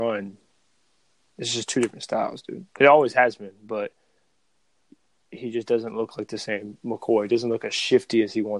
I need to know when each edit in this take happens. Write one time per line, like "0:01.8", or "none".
none